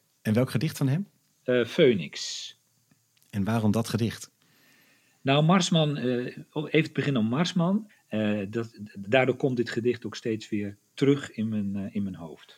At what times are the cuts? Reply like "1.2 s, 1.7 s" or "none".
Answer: 7.9 s